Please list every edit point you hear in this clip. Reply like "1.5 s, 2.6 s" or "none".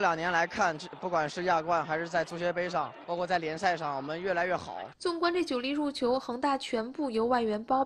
4.9 s